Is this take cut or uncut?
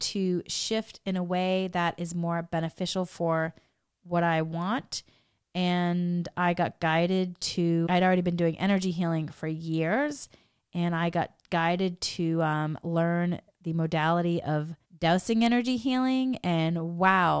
cut